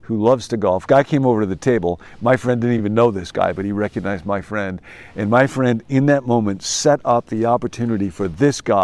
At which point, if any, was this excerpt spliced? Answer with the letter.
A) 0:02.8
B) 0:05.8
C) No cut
C